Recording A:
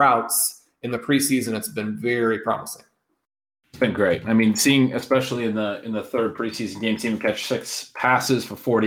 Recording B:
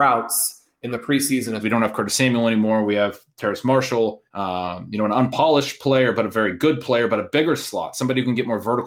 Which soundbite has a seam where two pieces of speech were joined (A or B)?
B